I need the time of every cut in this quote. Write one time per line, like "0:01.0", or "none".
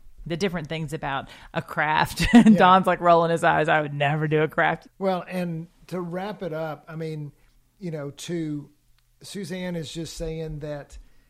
0:04.8